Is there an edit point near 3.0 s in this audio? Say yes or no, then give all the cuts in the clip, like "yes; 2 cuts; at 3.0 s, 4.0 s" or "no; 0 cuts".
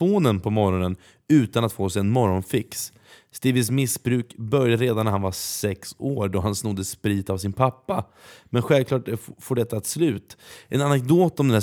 no; 0 cuts